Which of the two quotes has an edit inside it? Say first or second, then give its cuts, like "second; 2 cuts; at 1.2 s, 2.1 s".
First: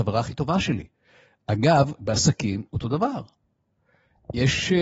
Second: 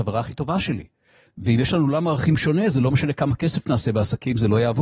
second; 1 cut; at 1.3 s